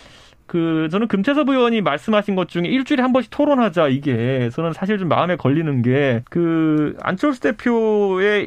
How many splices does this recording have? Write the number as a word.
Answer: one